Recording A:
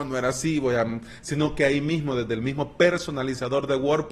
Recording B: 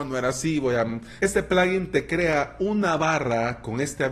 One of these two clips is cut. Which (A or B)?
B